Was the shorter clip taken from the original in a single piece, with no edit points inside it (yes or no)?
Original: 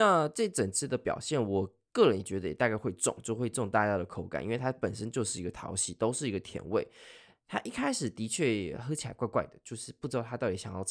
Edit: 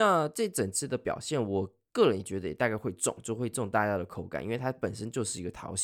yes